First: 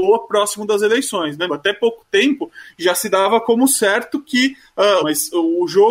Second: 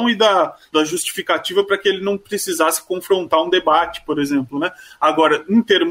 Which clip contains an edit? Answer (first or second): first